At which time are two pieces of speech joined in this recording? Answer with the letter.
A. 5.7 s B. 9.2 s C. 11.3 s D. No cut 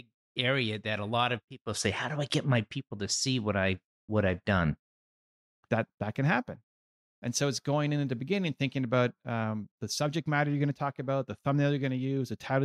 A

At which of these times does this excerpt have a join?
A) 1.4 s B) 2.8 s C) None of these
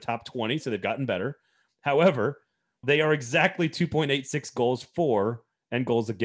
B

